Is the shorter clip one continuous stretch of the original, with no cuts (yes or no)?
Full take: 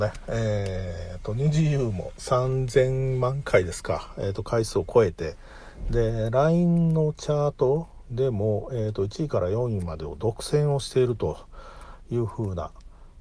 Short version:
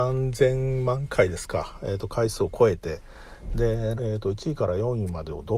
no